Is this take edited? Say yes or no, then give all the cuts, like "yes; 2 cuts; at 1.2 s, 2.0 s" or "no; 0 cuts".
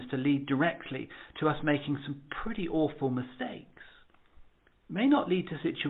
no; 0 cuts